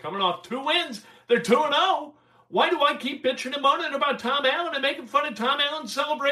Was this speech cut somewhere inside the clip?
no; 0 cuts

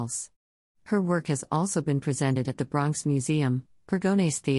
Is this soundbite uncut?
yes; 0 cuts

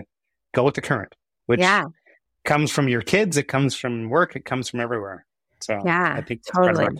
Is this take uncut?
yes; 0 cuts

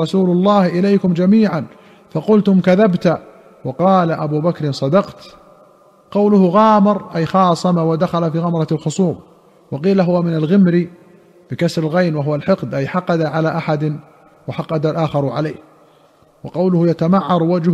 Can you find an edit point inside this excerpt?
no; 0 cuts

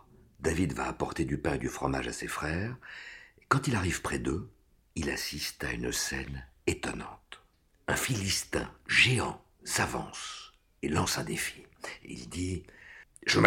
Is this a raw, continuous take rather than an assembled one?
yes; 0 cuts

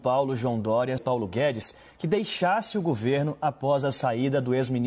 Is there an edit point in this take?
yes; 1 cut; at 1.0 s

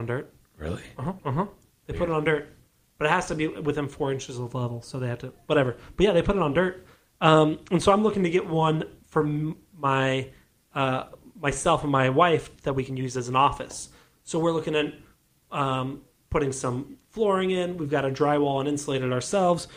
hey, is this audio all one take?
no; 1 cut; at 1.2 s

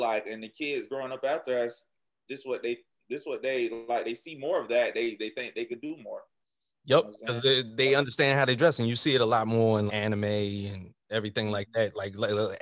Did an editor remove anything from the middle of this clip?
yes; 1 cut; at 9.9 s

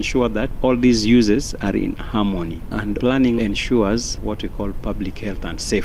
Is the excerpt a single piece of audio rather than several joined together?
no; 1 cut; at 3.4 s

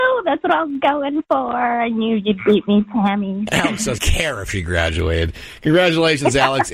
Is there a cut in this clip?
yes; 1 cut; at 4.0 s

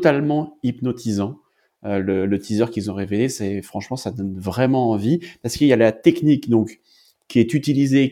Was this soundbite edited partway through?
no; 0 cuts

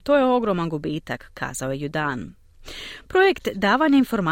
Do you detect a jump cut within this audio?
yes; 1 cut; at 3.0 s

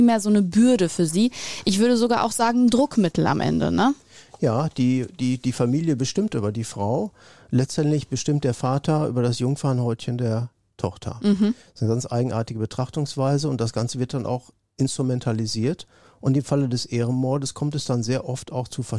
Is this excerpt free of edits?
yes; 0 cuts

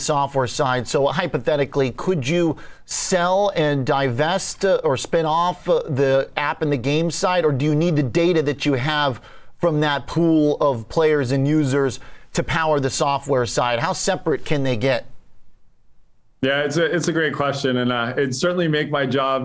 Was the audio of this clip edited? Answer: no; 0 cuts

